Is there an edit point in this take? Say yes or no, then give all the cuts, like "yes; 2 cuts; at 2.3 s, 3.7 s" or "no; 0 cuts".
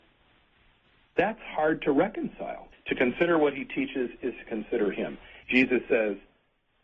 yes; 2 cuts; at 2.7 s, 5.4 s